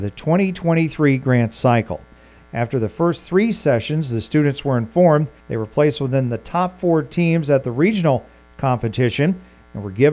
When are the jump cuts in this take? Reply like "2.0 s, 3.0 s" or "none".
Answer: 2.4 s, 5.4 s